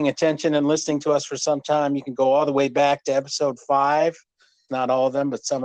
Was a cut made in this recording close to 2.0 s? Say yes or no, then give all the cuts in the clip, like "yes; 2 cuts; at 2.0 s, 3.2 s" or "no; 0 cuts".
no; 1 cut; at 4.7 s